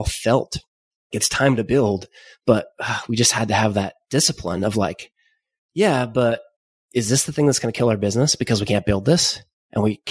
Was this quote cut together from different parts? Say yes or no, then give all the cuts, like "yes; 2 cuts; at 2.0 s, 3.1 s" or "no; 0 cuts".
no; 0 cuts